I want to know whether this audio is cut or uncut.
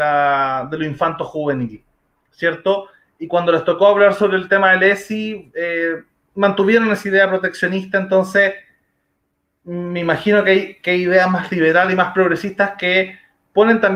uncut